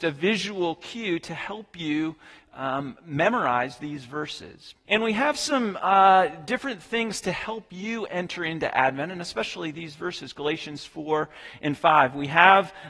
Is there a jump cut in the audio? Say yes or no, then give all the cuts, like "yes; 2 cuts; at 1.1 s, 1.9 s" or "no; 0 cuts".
yes; 1 cut; at 4.8 s